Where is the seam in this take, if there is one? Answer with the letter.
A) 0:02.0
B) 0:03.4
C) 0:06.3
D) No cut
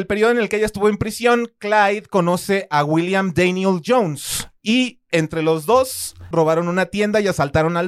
C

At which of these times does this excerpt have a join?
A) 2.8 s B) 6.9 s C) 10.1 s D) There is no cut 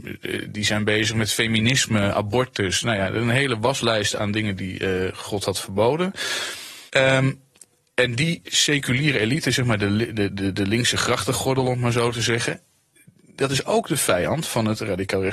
B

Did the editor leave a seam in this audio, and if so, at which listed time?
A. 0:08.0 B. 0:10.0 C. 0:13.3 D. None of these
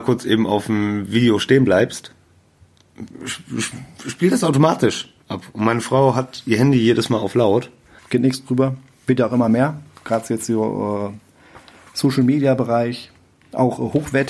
A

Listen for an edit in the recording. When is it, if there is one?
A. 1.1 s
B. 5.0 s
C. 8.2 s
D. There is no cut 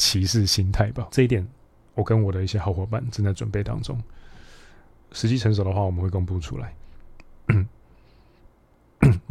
A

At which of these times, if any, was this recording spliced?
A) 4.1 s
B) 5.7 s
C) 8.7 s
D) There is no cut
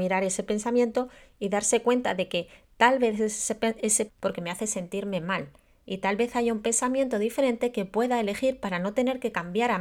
A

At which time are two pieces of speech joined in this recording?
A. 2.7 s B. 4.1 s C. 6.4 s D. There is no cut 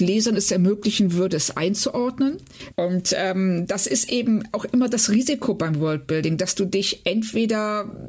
A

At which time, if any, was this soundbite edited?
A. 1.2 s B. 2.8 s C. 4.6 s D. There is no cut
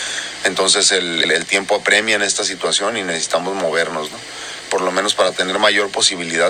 A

